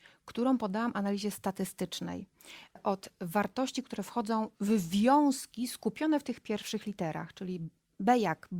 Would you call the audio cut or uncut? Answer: cut